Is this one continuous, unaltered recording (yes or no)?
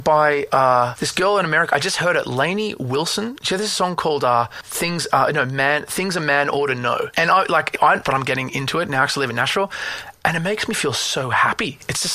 no